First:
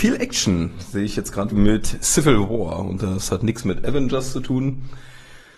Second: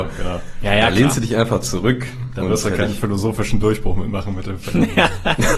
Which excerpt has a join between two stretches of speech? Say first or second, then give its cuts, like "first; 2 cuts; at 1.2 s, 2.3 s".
first; 1 cut; at 1.5 s